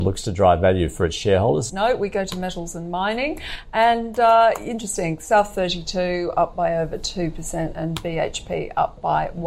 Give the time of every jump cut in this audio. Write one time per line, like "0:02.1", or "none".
0:01.7